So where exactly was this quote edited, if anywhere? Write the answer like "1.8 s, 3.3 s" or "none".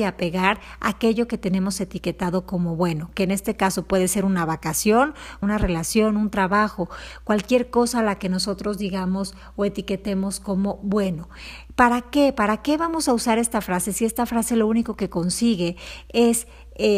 5.4 s